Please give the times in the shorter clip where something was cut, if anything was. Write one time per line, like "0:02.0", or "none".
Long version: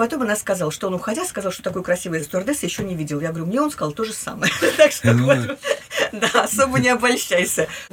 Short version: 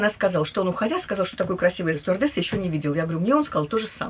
none